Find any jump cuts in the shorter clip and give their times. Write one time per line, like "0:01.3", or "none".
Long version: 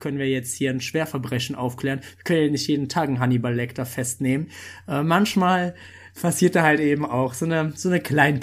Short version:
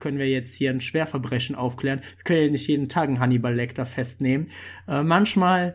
none

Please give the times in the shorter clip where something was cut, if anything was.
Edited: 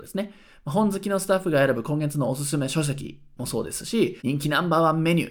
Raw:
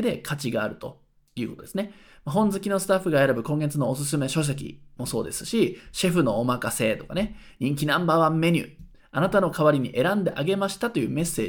0:04.2

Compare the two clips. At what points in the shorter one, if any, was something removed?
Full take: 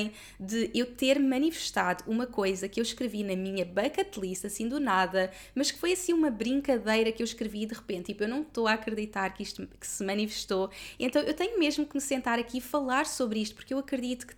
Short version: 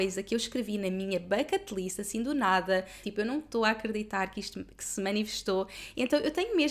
0:03.0

